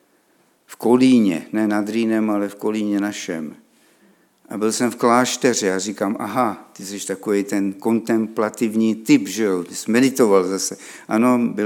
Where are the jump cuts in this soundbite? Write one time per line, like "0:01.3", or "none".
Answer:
none